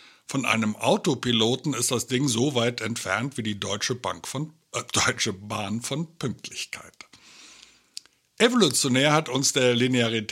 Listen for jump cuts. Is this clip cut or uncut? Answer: uncut